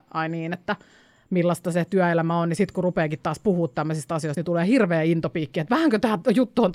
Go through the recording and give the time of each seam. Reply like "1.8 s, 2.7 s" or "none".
none